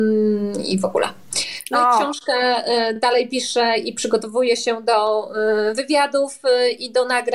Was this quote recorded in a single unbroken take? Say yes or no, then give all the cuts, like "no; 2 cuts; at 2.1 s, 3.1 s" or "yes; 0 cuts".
yes; 0 cuts